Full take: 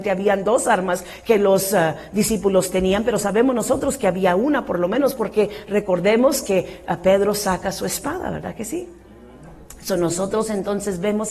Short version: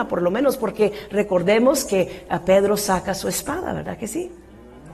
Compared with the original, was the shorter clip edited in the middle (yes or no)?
no